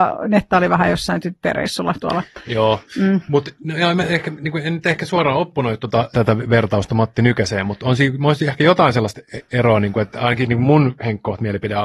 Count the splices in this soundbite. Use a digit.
1